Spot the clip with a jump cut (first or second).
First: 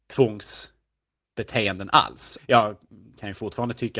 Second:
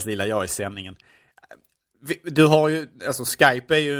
first